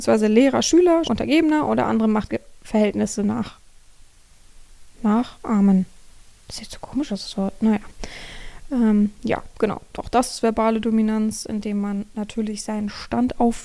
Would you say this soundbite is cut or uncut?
cut